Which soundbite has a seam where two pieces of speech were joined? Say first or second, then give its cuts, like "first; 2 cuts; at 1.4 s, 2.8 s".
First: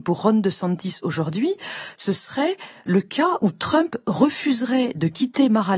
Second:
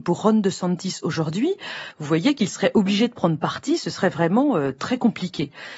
second; 1 cut; at 1.9 s